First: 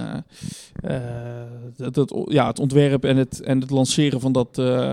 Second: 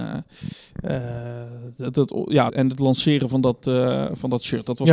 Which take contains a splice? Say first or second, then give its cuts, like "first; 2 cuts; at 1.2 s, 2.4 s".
second; 1 cut; at 2.5 s